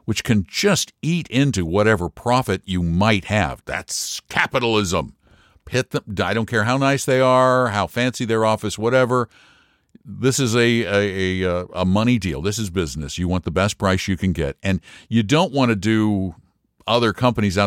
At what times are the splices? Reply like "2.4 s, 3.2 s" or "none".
3.6 s